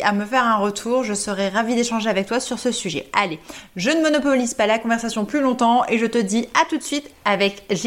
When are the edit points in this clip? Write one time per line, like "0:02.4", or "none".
none